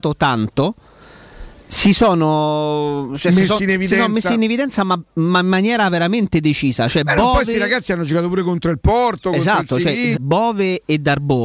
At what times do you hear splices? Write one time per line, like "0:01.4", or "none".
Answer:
0:10.1